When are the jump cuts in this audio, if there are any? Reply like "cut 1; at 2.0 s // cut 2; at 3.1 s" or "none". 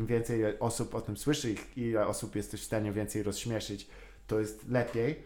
none